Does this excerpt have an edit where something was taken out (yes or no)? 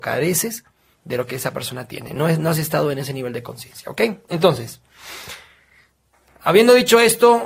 no